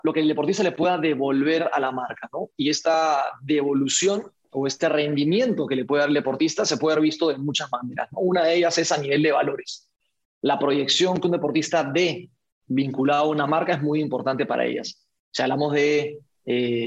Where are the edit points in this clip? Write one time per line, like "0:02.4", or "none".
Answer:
none